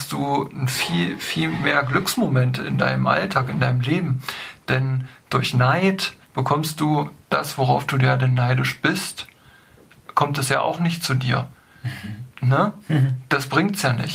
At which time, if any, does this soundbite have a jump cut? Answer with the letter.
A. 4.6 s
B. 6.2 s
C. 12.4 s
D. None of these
B